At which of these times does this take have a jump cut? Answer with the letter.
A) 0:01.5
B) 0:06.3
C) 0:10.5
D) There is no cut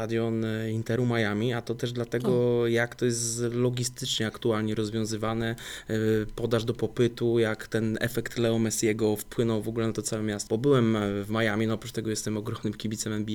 C